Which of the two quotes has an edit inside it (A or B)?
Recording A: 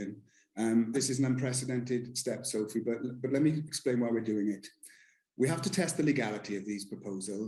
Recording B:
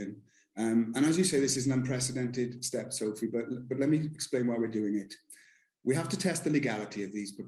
A